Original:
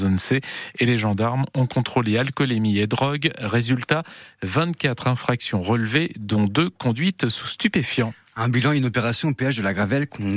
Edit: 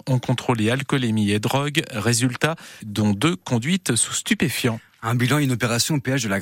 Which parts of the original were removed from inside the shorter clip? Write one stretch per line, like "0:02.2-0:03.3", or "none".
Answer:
0:04.3-0:06.1

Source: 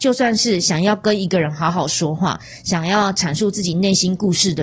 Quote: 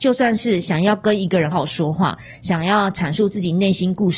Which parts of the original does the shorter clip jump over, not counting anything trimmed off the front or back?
0:01.5-0:01.7

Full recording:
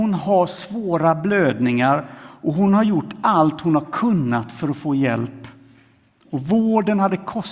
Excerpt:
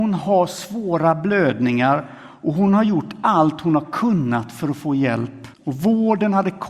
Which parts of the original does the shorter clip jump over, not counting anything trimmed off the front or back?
0:05.5-0:06.2

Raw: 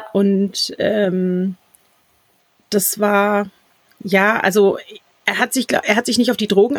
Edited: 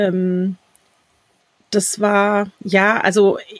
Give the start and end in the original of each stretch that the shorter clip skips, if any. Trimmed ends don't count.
0:03.5-0:03.9

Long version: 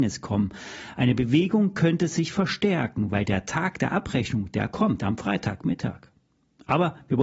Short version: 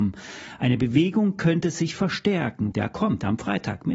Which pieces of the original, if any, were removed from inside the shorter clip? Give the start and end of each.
0:03.1-0:04.5

